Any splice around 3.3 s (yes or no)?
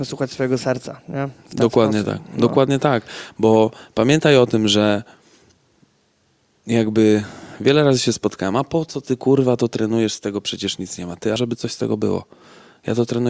no